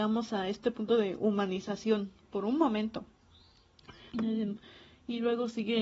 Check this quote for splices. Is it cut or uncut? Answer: cut